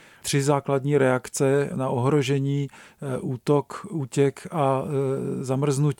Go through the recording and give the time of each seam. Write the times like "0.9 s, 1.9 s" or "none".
1.7 s